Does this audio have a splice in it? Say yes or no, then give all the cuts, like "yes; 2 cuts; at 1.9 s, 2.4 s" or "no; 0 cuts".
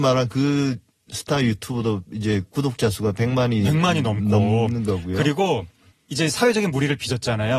no; 0 cuts